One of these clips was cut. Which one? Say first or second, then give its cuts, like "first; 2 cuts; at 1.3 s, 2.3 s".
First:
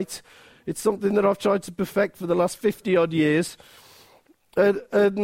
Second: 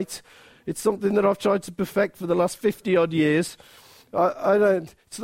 second; 1 cut; at 4.0 s